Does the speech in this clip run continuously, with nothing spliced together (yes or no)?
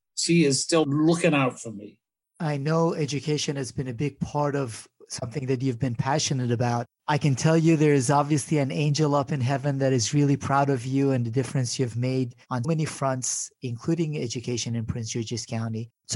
no